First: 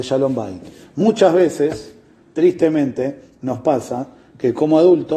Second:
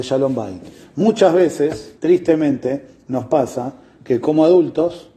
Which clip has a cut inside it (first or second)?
second